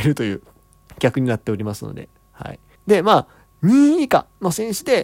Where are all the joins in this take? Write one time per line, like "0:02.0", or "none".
0:02.8